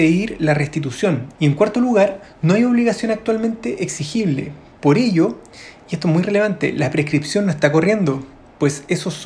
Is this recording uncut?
no; 1 cut; at 1.4 s

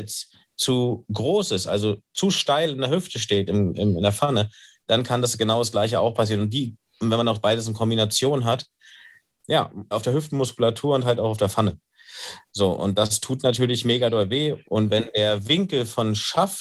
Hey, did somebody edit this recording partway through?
yes; 2 cuts; at 9.9 s, 14.6 s

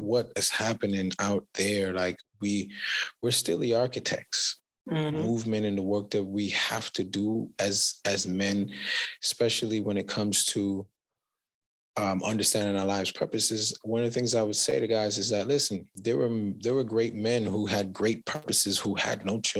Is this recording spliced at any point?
yes; 1 cut; at 5.1 s

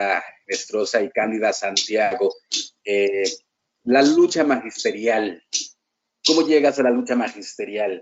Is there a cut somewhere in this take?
no; 0 cuts

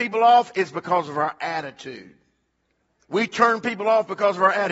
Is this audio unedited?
no; 1 cut; at 3.0 s

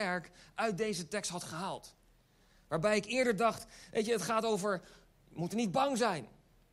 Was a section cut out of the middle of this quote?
no; 0 cuts

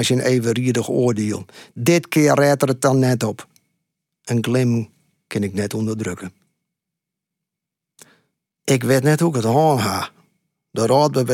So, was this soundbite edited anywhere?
no; 0 cuts

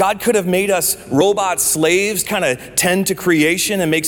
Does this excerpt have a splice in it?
yes; 1 cut; at 2.3 s

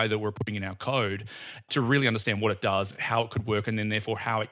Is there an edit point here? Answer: no; 0 cuts

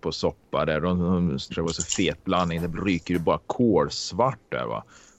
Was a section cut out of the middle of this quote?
yes; 1 cut; at 1.5 s

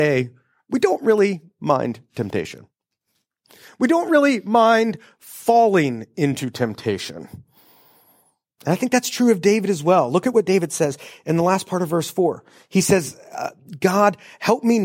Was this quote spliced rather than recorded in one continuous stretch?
no; 0 cuts

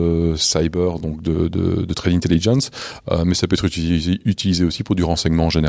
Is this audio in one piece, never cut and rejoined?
yes; 0 cuts

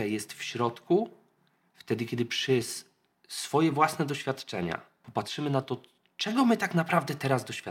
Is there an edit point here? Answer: no; 0 cuts

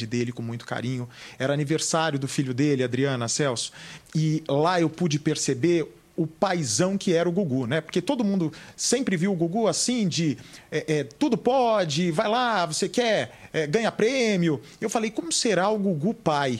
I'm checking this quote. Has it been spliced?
no; 0 cuts

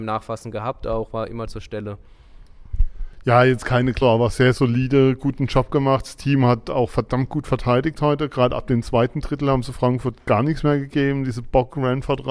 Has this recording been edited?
yes; 1 cut; at 4.0 s

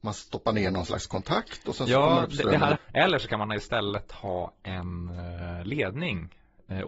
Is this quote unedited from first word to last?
no; 1 cut; at 2.8 s

